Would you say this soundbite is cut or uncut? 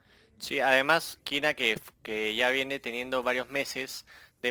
cut